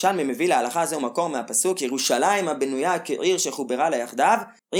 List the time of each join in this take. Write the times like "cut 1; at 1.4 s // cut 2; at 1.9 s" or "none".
none